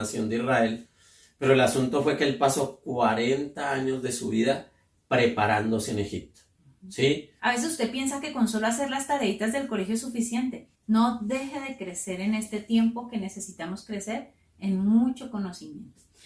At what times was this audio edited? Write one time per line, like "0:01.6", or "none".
0:07.4
0:10.7